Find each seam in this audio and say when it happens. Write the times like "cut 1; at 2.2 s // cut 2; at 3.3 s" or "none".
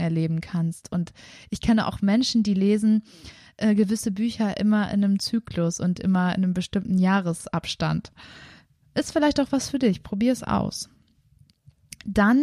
none